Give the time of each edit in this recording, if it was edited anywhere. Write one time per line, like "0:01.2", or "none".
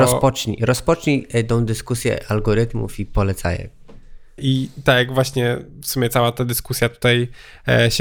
0:04.4